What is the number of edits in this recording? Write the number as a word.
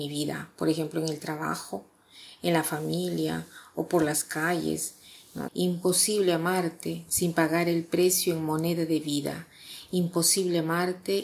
one